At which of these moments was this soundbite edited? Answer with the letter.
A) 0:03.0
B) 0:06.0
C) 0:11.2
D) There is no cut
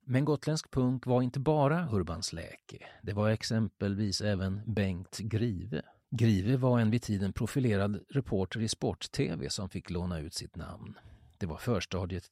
D